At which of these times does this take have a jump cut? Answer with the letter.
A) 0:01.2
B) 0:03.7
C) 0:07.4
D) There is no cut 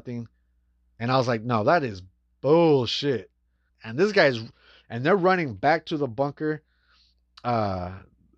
B